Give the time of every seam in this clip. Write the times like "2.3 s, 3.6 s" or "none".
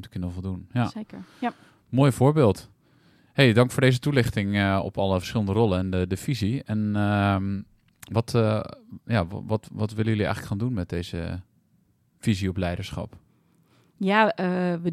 none